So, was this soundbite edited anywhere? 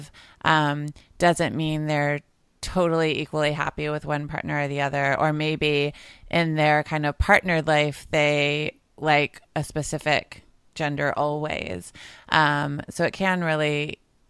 no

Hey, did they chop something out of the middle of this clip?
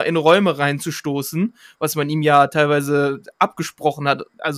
no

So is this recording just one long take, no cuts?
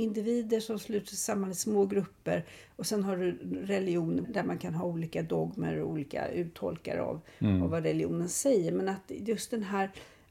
no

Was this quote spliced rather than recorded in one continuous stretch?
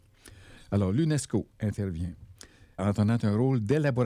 yes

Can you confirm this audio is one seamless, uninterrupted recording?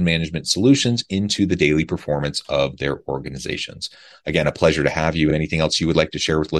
yes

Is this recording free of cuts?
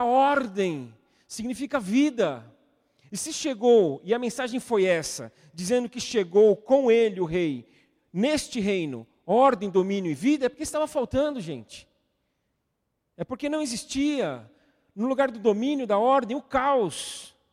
yes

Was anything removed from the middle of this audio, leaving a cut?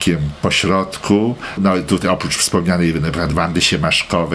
yes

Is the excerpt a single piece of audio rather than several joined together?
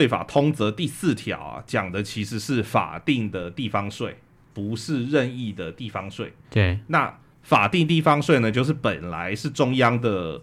no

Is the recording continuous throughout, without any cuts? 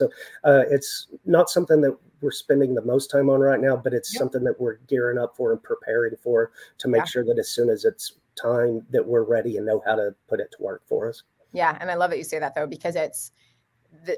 yes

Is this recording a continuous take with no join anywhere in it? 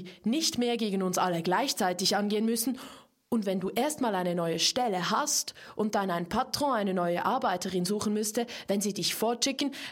yes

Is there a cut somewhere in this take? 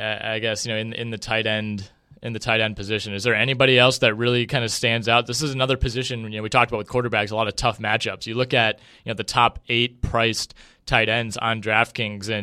no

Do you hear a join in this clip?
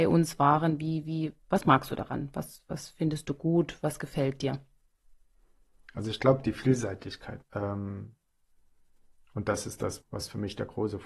yes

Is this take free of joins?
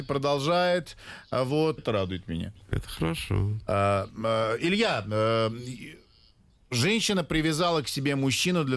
no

